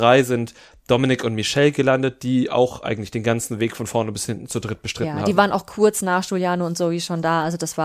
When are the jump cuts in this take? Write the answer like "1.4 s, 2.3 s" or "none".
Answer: none